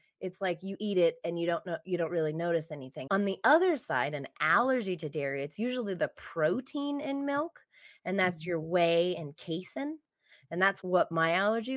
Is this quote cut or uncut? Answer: cut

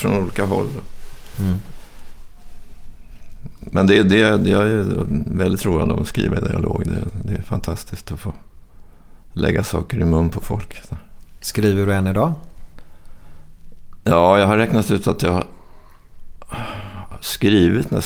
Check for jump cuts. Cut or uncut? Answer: uncut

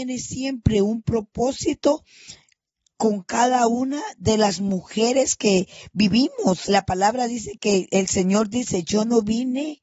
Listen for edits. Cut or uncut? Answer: cut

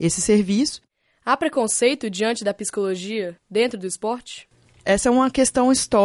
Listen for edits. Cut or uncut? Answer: uncut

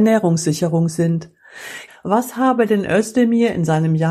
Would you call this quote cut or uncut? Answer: cut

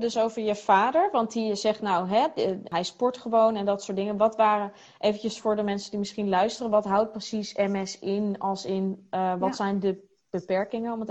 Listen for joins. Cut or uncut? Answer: uncut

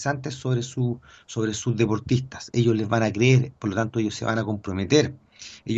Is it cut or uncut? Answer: uncut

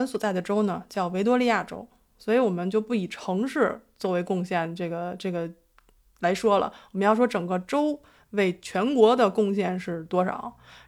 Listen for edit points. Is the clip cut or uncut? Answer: uncut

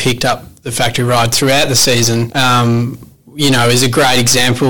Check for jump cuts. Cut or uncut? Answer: cut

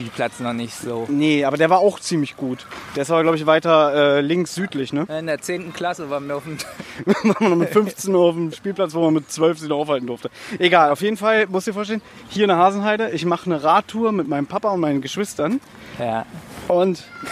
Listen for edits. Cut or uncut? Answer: uncut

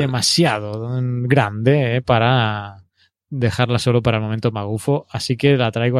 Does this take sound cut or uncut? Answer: uncut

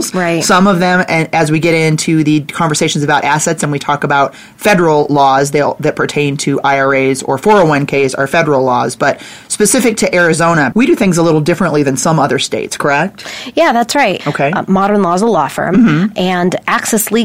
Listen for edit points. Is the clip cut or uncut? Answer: cut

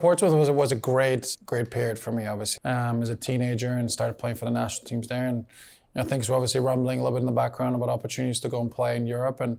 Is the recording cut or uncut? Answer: cut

